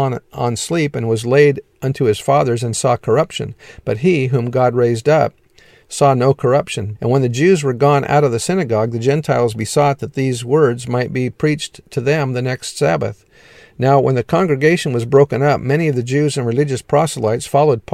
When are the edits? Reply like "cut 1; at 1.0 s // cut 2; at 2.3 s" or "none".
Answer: cut 1; at 6.9 s

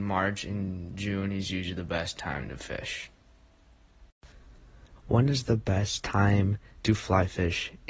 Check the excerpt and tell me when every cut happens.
cut 1; at 5.0 s

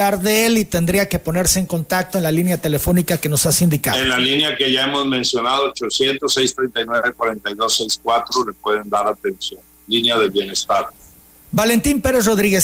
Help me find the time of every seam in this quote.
none

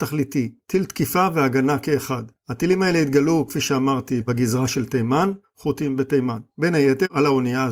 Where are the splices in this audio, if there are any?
cut 1; at 5.4 s

